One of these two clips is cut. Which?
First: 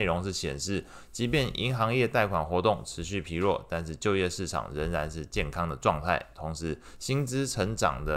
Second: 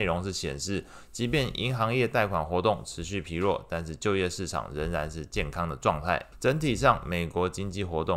second; 1 cut; at 6.3 s

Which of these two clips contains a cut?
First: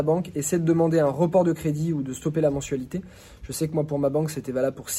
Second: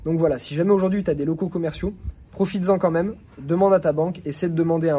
second; 1 cut; at 2.2 s

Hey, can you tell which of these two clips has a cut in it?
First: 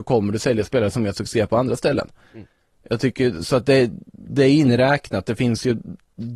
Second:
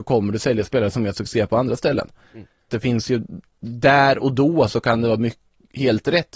second; 1 cut; at 2.7 s

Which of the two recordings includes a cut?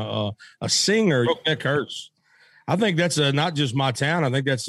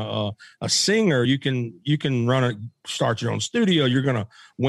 first; 1 cut; at 1.2 s

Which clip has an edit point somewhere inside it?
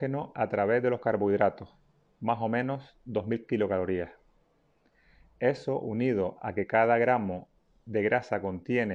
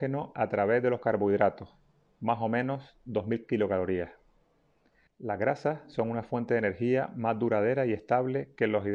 second; 1 cut; at 5.1 s

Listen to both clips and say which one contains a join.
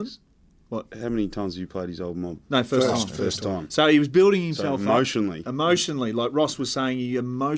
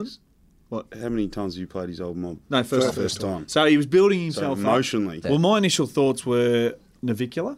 second; 2 cuts; at 2.9 s, 5.2 s

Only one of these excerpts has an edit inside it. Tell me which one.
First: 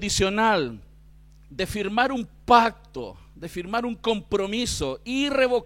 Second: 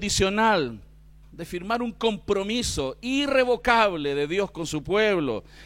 second; 1 cut; at 1.2 s

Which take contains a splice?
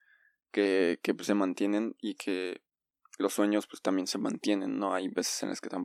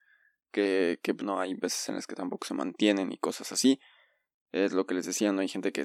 second; 1 cut; at 1.2 s

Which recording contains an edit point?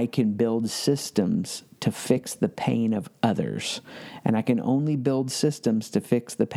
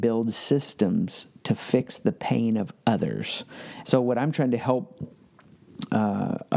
second; 1 cut; at 3.8 s

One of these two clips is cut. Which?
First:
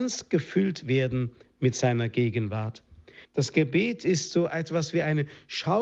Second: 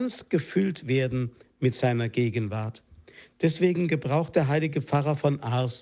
first; 1 cut; at 3.3 s

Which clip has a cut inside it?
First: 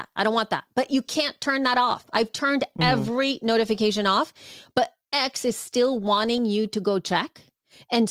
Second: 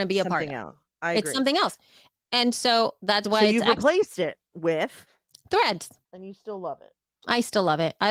second; 1 cut; at 6.0 s

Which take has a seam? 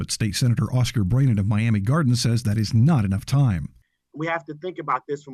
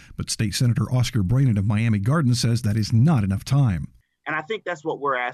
second; 1 cut; at 4.2 s

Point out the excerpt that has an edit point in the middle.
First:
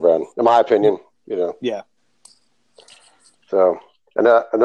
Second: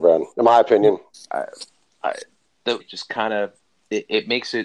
second; 2 cuts; at 1.1 s, 2.8 s

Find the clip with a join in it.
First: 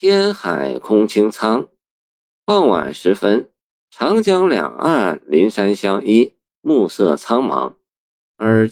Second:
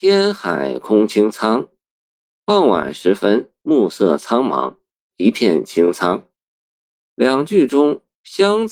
second; 2 cuts; at 3.6 s, 5.1 s

